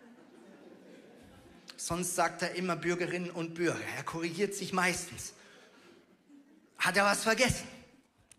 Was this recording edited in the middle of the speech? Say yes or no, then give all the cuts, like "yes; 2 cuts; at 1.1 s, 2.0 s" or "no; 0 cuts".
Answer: no; 0 cuts